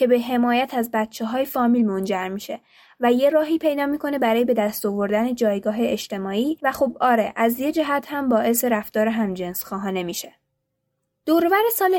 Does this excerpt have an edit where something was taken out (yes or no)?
no